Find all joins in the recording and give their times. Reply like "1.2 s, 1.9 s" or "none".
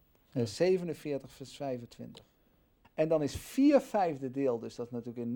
2.8 s